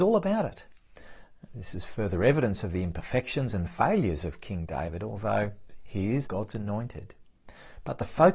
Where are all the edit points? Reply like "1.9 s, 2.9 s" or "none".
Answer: 6.2 s